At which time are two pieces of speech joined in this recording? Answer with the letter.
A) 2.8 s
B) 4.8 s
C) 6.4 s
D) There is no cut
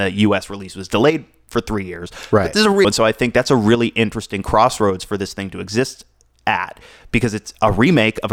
A